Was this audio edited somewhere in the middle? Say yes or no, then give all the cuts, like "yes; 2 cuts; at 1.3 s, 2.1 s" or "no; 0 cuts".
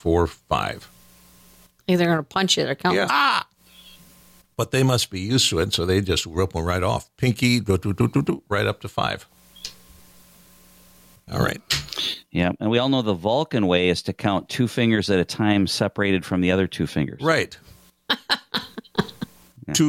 yes; 1 cut; at 3.1 s